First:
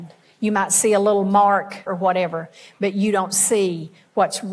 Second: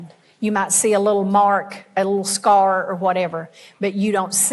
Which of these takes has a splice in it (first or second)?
first